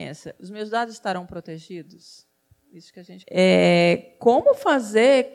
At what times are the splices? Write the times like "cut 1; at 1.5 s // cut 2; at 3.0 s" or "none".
cut 1; at 3.2 s